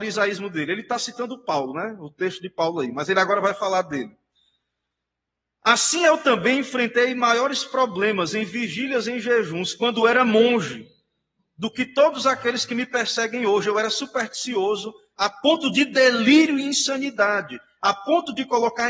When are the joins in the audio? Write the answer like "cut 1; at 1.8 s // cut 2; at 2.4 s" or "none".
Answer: none